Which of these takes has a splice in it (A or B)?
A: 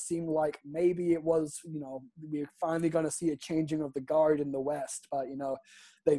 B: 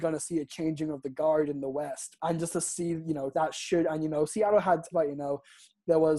B